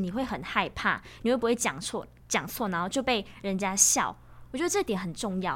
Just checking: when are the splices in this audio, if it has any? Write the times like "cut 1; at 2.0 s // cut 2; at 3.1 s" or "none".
none